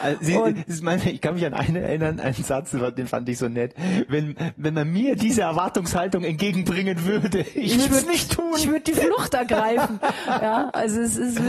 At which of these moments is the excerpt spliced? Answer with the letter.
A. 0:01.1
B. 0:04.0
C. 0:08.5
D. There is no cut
D